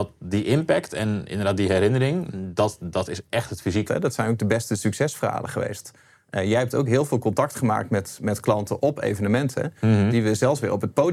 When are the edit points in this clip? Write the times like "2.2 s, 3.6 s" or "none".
3.9 s, 10.1 s